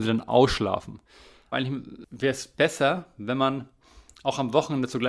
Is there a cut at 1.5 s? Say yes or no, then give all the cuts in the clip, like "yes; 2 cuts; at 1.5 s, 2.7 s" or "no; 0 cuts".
yes; 1 cut; at 1.5 s